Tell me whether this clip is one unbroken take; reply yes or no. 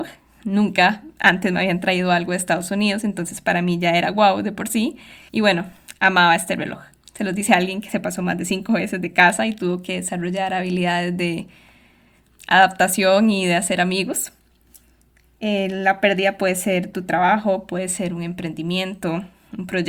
no